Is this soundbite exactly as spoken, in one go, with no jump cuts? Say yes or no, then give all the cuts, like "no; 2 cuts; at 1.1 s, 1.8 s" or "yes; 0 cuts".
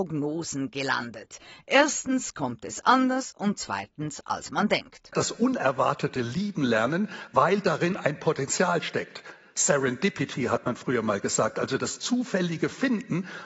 yes; 0 cuts